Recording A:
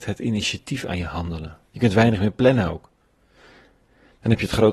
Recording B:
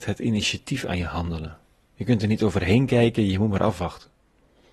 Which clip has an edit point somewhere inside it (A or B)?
A